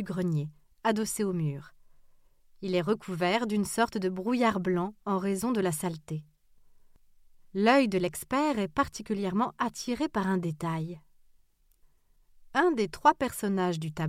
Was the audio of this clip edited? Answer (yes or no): no